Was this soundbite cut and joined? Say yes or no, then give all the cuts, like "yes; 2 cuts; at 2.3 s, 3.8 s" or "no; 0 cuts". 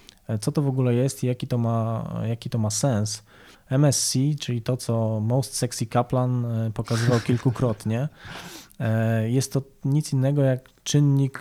yes; 1 cut; at 3.5 s